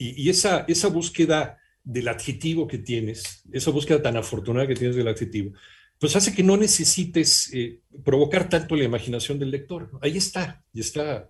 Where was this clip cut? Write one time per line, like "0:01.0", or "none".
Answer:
none